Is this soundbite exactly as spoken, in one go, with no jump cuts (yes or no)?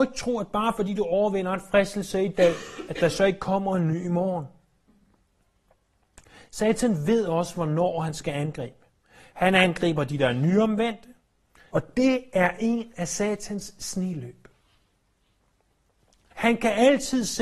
no